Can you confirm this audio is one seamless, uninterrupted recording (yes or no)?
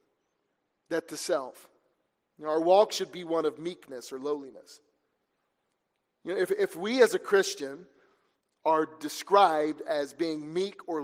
no